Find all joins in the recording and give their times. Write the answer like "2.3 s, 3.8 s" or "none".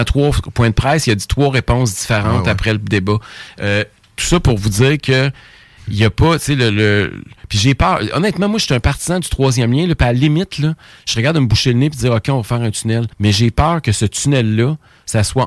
13.1 s